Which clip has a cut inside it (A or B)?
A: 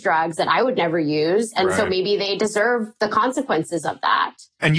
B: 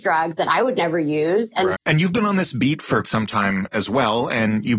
B